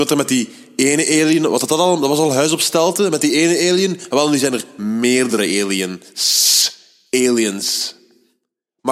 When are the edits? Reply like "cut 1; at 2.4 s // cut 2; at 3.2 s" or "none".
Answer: none